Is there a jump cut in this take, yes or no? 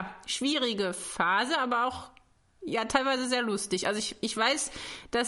no